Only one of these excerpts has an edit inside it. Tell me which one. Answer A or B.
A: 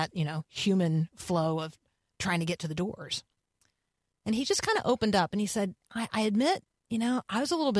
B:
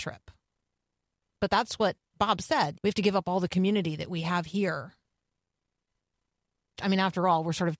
B